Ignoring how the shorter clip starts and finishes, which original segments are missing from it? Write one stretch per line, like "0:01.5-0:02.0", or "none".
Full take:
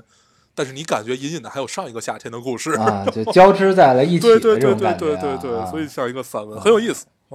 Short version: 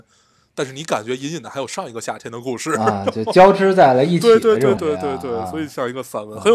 0:04.8-0:05.0